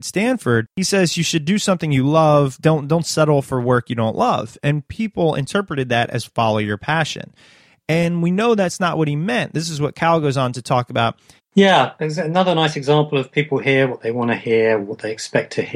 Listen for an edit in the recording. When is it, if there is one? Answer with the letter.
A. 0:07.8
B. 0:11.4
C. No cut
B